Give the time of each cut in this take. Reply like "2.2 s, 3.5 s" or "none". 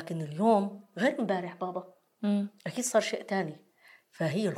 2.6 s